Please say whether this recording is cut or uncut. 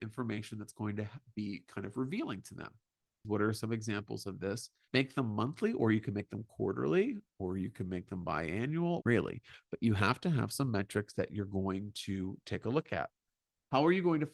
cut